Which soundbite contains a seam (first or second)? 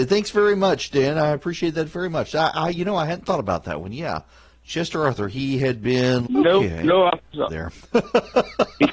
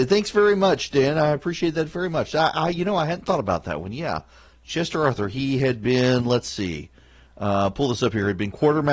first